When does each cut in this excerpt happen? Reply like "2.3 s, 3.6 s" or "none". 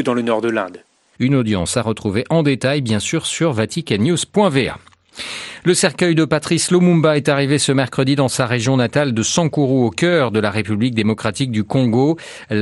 1.2 s

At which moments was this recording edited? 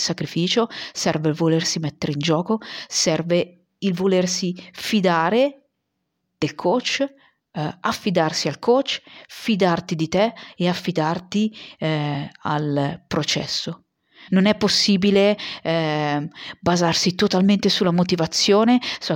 14.3 s

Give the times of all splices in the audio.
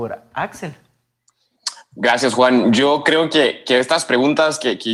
none

